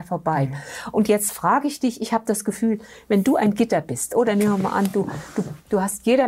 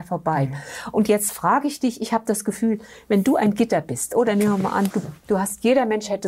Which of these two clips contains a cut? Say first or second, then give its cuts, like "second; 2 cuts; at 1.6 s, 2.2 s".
second; 1 cut; at 4.9 s